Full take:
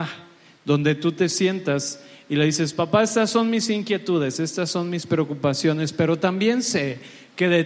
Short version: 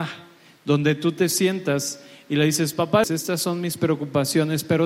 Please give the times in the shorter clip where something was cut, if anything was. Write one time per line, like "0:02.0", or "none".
0:03.0